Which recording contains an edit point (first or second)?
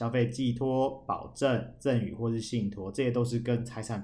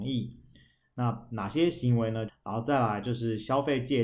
second